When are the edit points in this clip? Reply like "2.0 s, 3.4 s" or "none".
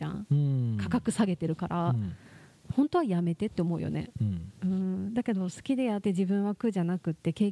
6.0 s